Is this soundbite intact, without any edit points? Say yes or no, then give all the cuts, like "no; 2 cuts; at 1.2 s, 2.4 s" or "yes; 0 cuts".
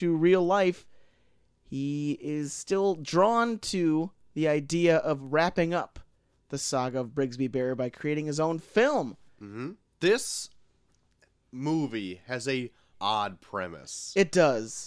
no; 2 cuts; at 9.9 s, 12.9 s